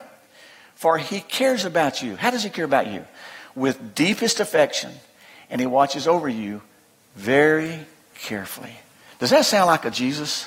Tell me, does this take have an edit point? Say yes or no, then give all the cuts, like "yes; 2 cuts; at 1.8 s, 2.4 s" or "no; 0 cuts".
no; 0 cuts